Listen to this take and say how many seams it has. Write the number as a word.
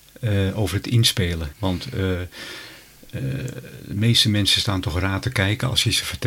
one